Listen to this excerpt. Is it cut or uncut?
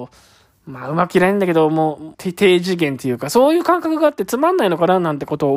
cut